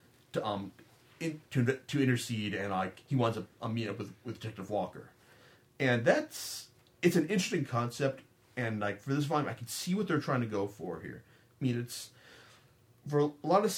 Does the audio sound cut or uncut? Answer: uncut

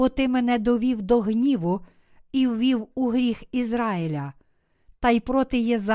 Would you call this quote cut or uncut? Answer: uncut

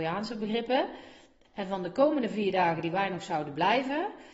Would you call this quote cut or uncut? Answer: cut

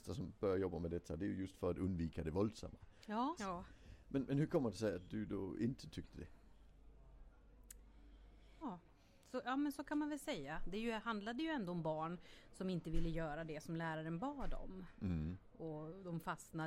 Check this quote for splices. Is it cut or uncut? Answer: cut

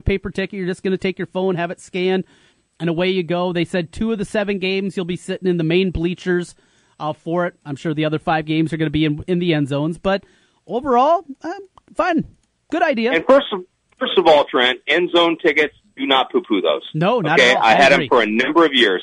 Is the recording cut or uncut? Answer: uncut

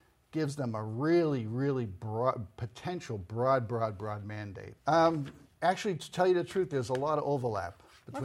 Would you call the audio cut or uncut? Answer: cut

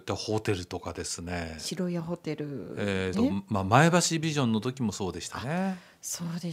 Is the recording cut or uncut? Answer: cut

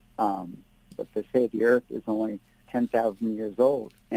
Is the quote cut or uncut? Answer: cut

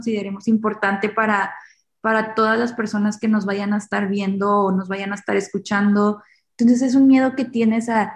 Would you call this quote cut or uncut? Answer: cut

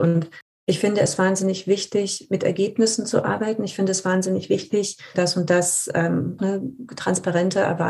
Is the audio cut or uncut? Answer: cut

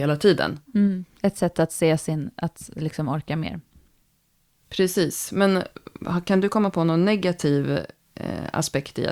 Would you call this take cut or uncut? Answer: uncut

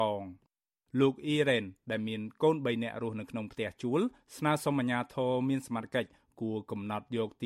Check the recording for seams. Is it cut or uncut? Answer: uncut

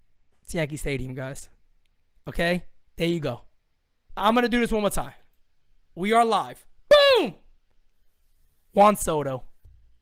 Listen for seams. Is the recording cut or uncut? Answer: cut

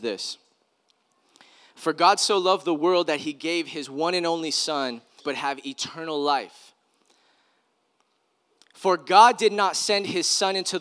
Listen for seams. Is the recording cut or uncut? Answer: cut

